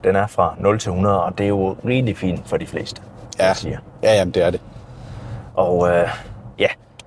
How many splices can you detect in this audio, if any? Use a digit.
0